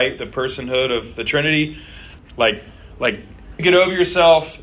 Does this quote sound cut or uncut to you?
cut